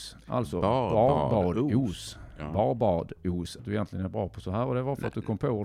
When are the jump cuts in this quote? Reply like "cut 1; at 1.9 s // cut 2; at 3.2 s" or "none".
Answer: cut 1; at 3.6 s